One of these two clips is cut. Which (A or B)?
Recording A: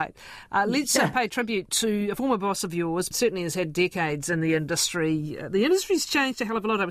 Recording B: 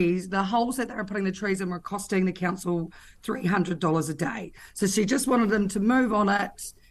A